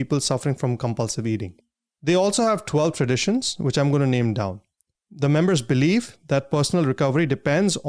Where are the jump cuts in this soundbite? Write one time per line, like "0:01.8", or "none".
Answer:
0:05.0